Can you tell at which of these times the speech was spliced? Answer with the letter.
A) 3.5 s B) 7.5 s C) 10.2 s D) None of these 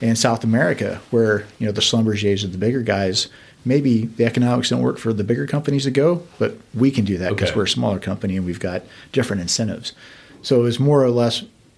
D